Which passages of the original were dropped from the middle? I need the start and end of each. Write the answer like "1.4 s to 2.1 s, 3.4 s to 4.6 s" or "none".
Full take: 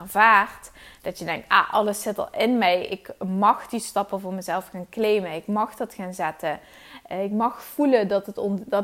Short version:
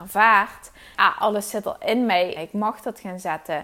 0.9 s to 1.5 s, 2.9 s to 5.3 s

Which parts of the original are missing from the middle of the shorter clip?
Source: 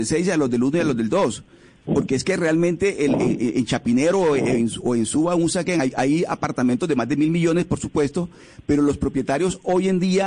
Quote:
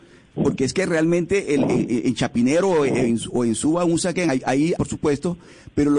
6.3 s to 7.7 s

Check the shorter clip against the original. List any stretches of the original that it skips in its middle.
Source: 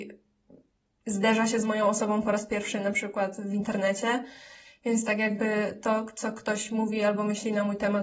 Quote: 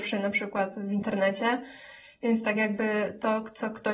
none

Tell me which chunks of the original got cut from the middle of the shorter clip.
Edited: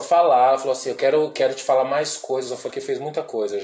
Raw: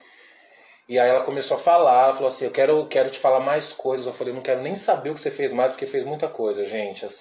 4.2 s to 5.7 s

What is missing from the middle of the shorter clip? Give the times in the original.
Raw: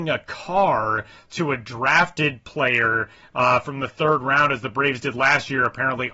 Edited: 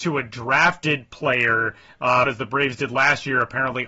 3.6 s to 4.5 s

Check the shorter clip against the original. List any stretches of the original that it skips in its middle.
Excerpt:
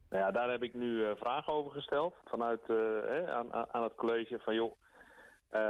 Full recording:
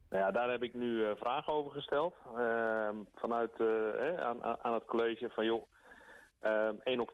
2.2 s to 3.1 s

